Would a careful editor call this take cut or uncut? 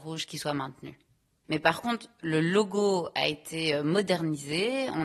cut